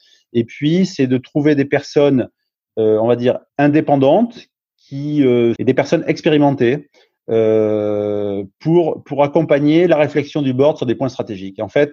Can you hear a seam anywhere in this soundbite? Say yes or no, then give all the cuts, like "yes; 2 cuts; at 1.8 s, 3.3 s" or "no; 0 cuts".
yes; 2 cuts; at 3.5 s, 5.6 s